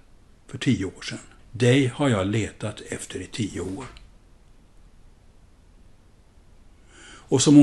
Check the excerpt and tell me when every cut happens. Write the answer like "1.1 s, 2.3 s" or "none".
1.4 s